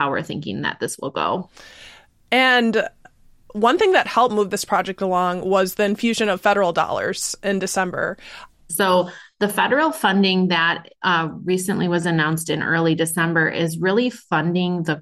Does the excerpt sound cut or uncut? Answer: cut